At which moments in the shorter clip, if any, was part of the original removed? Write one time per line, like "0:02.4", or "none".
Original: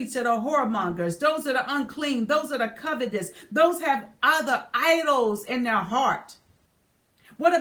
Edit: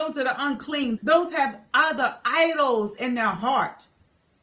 0:01.0